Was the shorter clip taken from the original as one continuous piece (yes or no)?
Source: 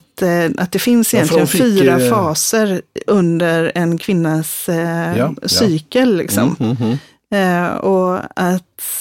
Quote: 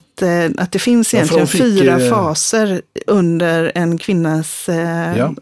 yes